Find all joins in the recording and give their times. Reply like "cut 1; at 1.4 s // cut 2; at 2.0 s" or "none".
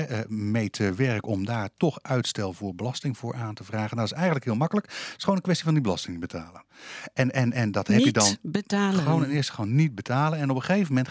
none